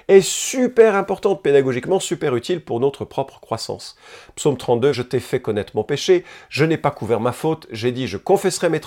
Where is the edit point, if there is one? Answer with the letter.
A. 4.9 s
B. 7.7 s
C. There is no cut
A